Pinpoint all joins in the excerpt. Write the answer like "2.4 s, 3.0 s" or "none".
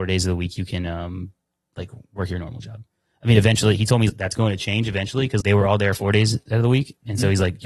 4.1 s, 5.4 s